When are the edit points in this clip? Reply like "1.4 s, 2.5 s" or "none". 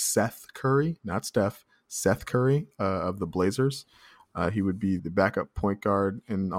5.0 s